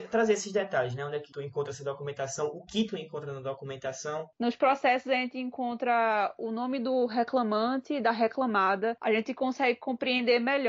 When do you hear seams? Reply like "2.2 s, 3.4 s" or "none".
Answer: 4.3 s